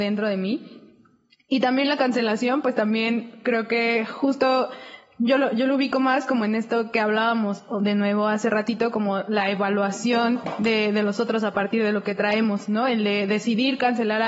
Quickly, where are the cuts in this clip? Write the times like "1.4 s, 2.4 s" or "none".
none